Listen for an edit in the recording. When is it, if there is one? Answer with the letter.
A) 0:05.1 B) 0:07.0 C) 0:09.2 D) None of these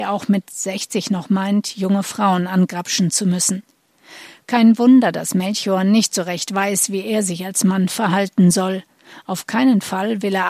D